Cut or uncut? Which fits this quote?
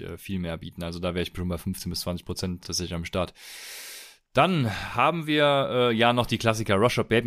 cut